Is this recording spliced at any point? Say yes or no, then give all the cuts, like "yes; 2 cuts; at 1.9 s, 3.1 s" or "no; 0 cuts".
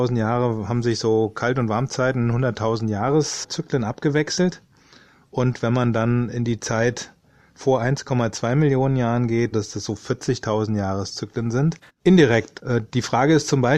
yes; 2 cuts; at 9.5 s, 11.9 s